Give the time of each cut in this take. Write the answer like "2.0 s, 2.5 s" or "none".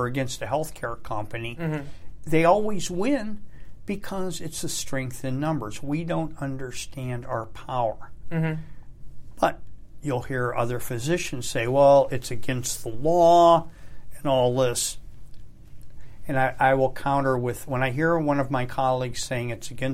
none